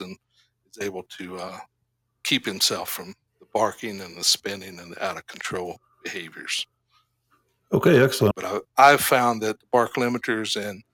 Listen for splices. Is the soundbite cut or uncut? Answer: cut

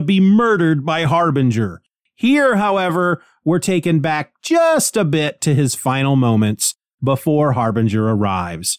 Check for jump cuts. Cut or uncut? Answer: uncut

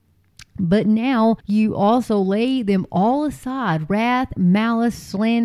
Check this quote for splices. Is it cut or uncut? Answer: cut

